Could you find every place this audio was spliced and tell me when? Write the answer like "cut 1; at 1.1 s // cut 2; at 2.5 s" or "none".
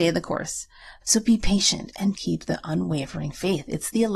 cut 1; at 1.0 s // cut 2; at 2.1 s

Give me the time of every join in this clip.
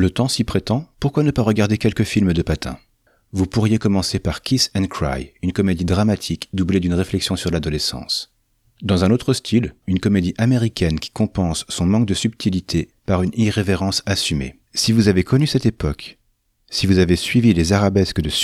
cut 1; at 8.6 s // cut 2; at 9.8 s // cut 3; at 14.7 s

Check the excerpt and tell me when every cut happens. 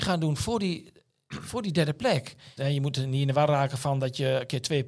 cut 1; at 2.6 s

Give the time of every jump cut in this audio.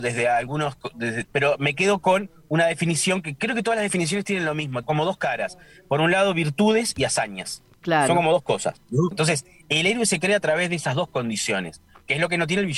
cut 1; at 1.2 s // cut 2; at 4.8 s // cut 3; at 9.1 s

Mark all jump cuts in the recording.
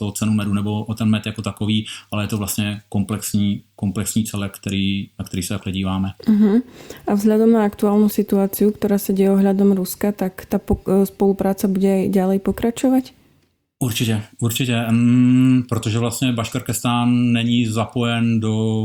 none

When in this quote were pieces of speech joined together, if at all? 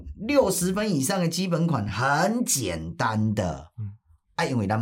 none

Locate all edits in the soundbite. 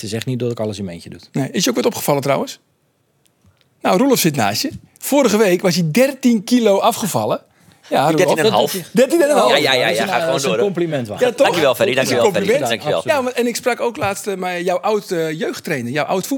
none

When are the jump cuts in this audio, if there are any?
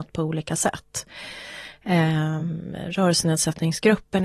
none

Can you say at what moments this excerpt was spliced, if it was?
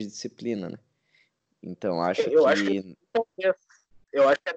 none

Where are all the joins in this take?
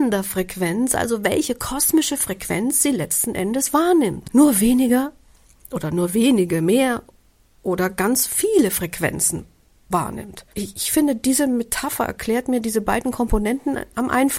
cut 1; at 4.2 s // cut 2; at 10.5 s

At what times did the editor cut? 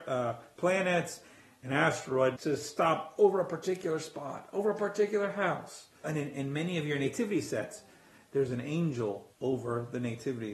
cut 1; at 2.4 s // cut 2; at 6.0 s // cut 3; at 9.3 s

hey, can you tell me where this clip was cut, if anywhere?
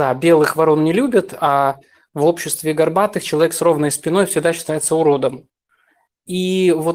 none

